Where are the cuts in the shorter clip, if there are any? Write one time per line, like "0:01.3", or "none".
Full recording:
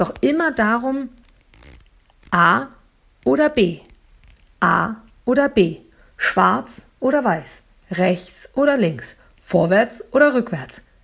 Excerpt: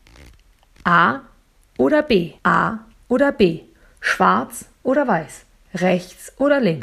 0:02.4